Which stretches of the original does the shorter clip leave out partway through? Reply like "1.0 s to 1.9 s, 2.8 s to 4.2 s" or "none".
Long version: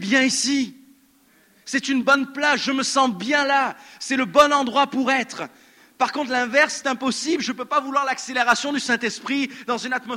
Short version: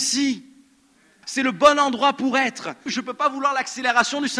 1.5 s to 4.0 s, 5.6 s to 7.4 s